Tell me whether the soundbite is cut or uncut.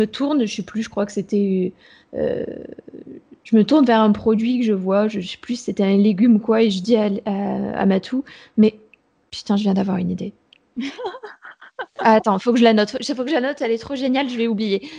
uncut